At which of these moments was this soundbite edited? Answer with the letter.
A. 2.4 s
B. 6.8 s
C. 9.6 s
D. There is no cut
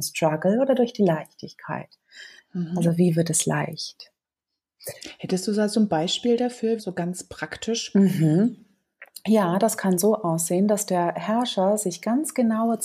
B